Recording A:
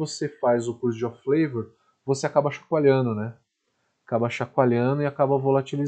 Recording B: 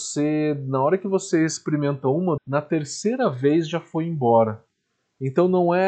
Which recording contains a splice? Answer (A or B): B